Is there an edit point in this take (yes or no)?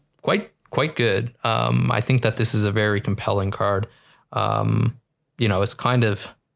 no